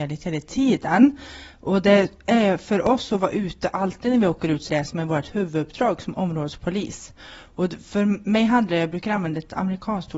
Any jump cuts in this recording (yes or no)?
yes